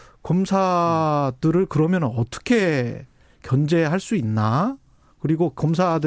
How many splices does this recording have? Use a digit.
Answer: 0